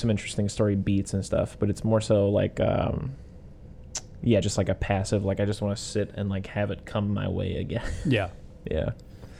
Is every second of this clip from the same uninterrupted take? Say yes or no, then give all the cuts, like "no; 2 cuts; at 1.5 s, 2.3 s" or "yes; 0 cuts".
yes; 0 cuts